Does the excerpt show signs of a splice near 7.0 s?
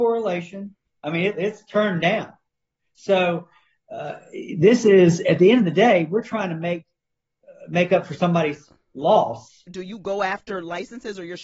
no; 2 cuts; at 1.0 s, 9.7 s

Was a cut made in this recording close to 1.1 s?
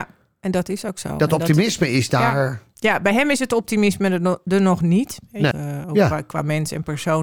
no; 1 cut; at 5.5 s

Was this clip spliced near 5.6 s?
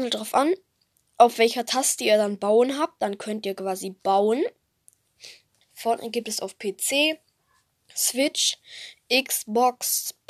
yes; 1 cut; at 5.6 s

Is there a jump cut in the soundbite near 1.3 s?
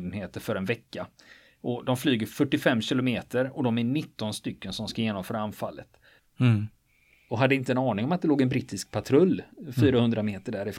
no; 1 cut; at 6.2 s

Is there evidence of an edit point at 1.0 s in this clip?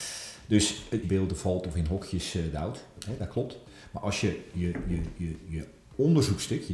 yes; 1 cut; at 1.0 s

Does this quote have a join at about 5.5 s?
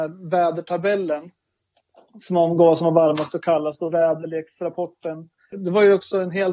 yes; 1 cut; at 5.5 s

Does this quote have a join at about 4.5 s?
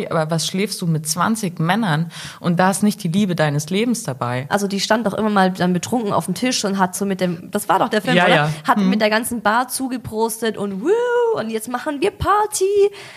yes; 1 cut; at 4.5 s

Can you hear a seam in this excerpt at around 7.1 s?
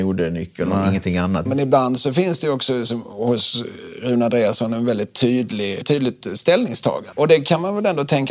yes; 3 cuts; at 1.5 s, 5.8 s, 7.1 s

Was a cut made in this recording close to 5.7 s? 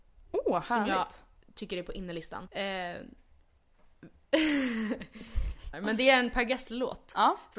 yes; 2 cuts; at 2.5 s, 5.7 s

